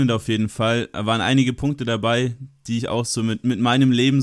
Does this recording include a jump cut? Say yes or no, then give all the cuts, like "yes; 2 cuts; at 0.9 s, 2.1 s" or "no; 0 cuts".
no; 0 cuts